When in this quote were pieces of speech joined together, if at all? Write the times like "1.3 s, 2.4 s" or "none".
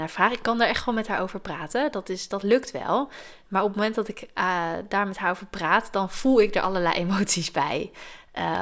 none